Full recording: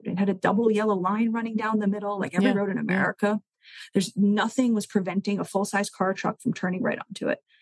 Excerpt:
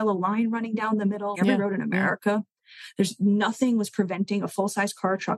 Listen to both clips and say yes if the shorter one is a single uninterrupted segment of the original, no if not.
no